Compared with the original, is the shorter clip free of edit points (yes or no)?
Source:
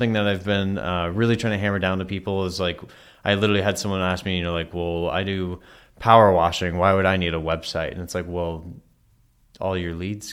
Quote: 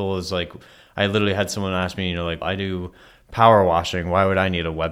no